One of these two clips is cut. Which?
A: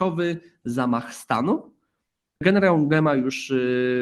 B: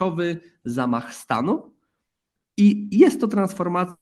A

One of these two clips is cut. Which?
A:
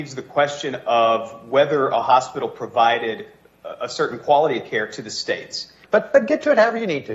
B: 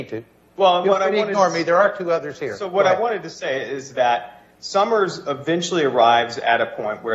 A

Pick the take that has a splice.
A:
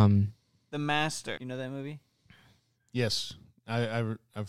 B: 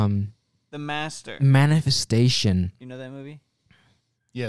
A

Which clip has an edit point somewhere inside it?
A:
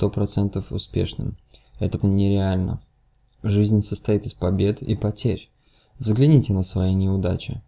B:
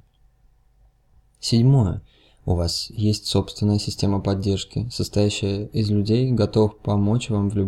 A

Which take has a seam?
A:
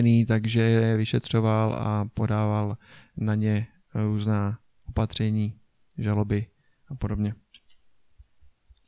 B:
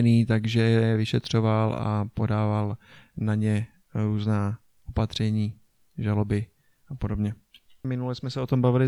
B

